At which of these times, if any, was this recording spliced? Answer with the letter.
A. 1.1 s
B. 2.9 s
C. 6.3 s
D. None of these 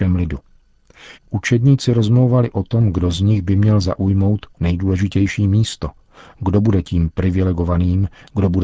A